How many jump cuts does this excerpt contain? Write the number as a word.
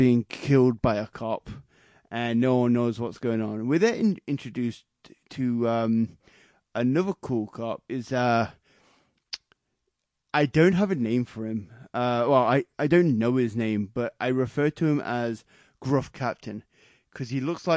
zero